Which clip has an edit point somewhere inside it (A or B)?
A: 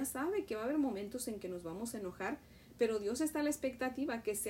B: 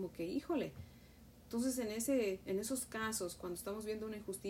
B